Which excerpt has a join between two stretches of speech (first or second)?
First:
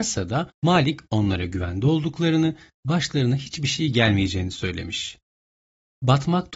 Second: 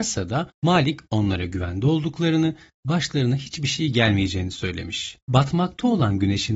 second